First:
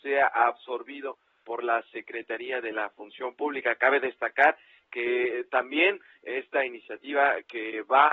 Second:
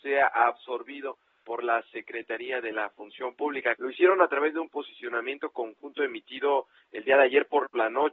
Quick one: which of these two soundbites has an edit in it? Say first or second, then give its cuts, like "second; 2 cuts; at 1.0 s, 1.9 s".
second; 1 cut; at 3.8 s